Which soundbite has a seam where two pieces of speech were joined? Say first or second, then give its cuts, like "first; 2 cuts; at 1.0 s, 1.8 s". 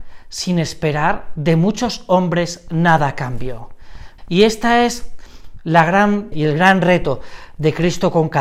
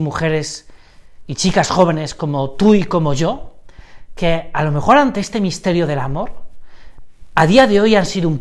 first; 2 cuts; at 4.2 s, 6.3 s